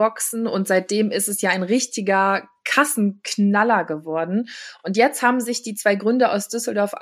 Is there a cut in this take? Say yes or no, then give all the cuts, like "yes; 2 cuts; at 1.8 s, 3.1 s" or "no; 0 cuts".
no; 0 cuts